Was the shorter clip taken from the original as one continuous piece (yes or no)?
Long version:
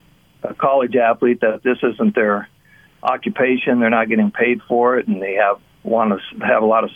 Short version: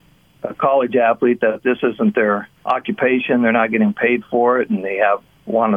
no